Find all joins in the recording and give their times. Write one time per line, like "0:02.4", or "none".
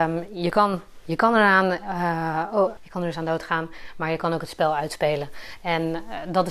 0:02.8